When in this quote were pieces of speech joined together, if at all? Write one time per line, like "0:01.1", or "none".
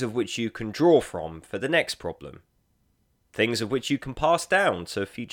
none